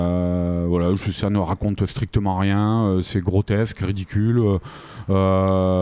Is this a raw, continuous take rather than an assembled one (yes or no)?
no